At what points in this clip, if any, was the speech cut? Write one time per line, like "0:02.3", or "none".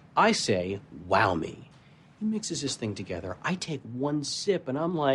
none

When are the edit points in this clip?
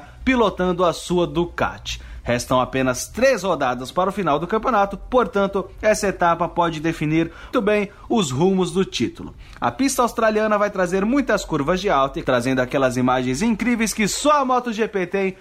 0:07.5
0:12.2

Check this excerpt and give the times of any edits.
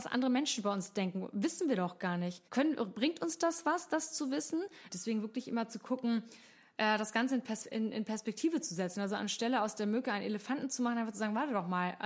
0:02.5
0:04.9

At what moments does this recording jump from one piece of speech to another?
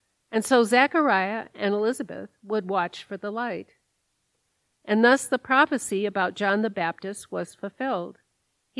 none

